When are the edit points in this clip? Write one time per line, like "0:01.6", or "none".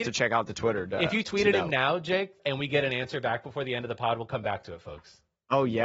0:02.4